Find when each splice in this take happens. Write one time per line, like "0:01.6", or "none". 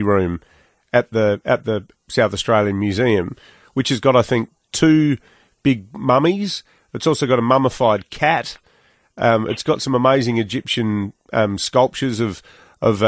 none